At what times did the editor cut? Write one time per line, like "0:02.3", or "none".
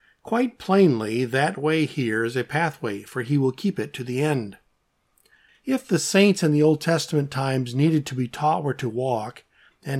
0:05.5